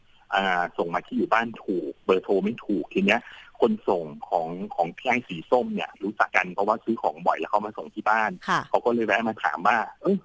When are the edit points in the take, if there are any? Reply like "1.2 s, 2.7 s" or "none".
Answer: 6.3 s